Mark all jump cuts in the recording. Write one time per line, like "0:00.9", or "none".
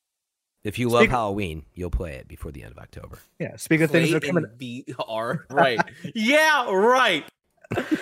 0:05.5